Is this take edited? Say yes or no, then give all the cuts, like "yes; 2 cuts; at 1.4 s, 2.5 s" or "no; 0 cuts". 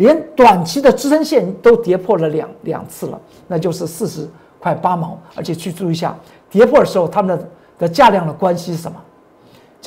no; 0 cuts